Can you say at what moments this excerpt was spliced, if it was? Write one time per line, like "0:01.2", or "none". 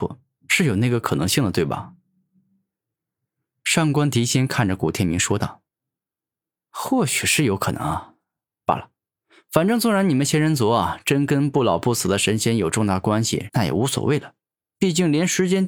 0:05.7
0:13.5